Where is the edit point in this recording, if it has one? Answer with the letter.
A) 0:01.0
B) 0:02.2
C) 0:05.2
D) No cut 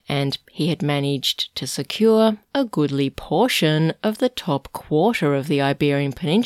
D